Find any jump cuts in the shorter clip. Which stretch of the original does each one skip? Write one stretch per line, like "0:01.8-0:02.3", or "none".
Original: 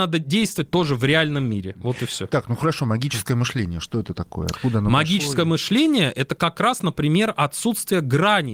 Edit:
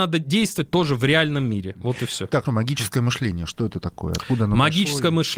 0:02.4-0:02.8